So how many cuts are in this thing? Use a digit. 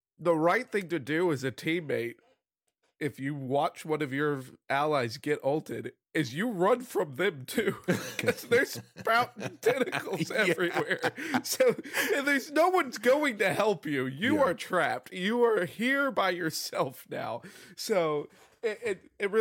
0